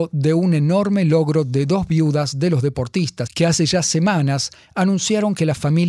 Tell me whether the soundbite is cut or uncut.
cut